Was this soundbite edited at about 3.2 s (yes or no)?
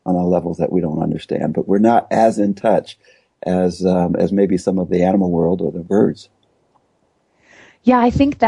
no